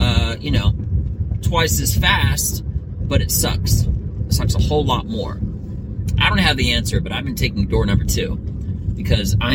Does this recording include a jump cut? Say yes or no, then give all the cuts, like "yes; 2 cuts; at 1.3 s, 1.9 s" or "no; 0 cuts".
no; 0 cuts